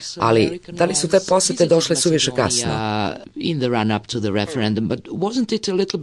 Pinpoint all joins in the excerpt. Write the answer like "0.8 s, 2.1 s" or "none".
none